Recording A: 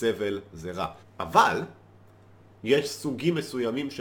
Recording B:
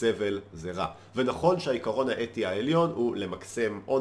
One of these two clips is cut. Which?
A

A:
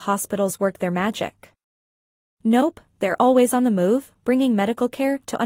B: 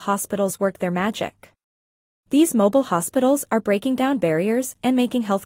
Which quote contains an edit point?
B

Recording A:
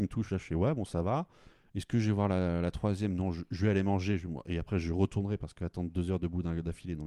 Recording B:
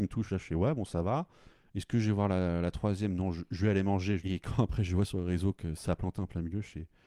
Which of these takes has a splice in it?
B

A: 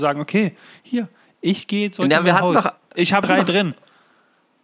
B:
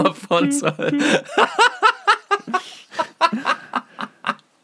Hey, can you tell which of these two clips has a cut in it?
A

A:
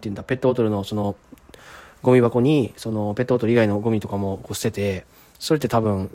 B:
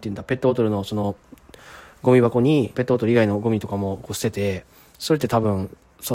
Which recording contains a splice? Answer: B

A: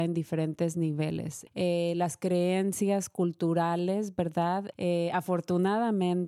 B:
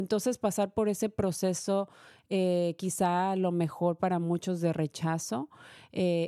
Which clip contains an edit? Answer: A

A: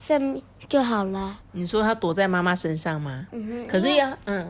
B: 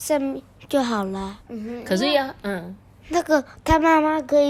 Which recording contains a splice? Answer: B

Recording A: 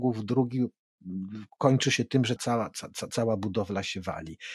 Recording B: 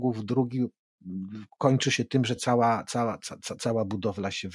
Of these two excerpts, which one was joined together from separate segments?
A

